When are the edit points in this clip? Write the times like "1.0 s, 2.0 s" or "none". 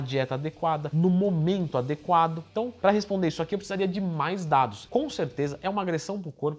4.9 s

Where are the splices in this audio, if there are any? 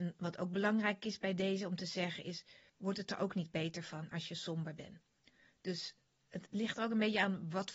2.7 s

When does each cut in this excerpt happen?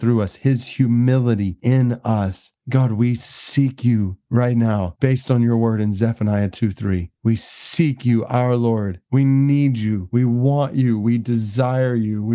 none

